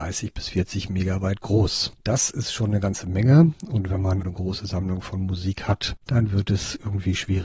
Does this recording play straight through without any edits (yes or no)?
no